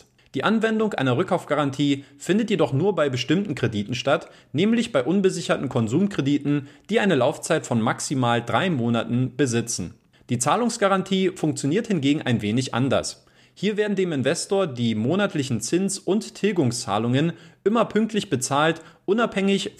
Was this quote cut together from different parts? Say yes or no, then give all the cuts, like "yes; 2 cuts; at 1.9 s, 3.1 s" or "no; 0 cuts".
no; 0 cuts